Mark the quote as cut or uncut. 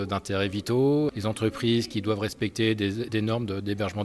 uncut